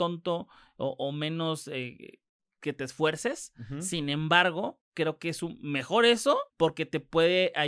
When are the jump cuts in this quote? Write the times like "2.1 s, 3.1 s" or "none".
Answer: 6.5 s